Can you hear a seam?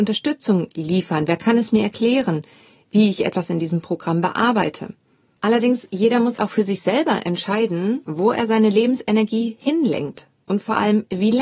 yes; 2 cuts; at 5.4 s, 6.4 s

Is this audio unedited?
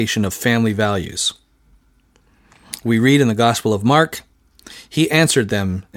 yes; 0 cuts

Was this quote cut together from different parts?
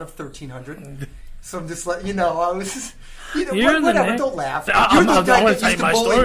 yes; 1 cut; at 4.7 s

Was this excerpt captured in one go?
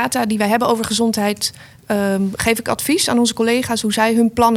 yes; 0 cuts

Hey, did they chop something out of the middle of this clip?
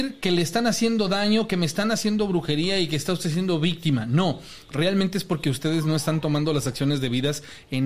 no; 0 cuts

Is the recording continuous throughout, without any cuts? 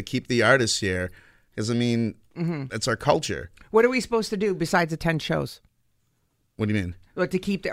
yes; 0 cuts

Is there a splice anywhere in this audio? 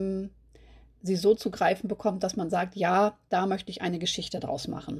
no; 0 cuts

